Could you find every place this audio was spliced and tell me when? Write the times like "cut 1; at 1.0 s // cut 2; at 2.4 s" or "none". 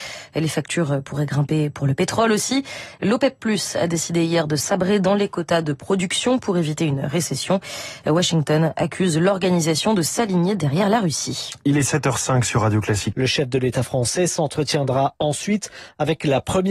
cut 1; at 13.1 s